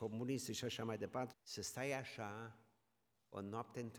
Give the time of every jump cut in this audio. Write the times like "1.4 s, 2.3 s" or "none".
1.3 s